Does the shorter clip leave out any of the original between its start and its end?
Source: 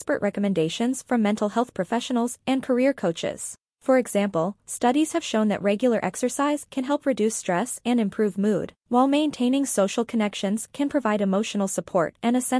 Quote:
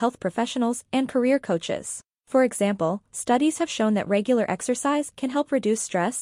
no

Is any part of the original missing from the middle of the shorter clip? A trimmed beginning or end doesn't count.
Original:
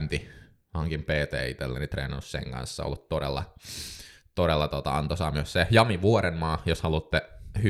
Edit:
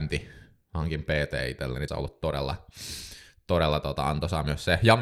yes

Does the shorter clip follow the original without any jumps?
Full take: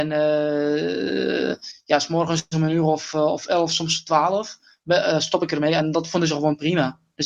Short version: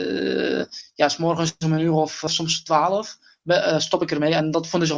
no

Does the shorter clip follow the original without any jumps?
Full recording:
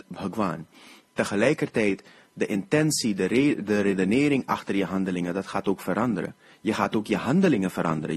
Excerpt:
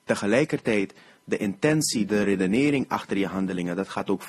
no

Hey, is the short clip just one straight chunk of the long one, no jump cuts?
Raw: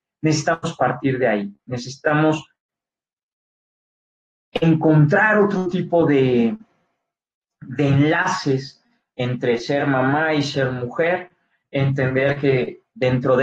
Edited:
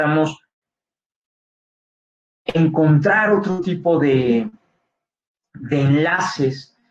yes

